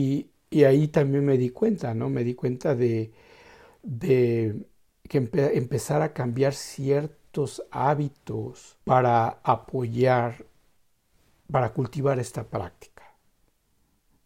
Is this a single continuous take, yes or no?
no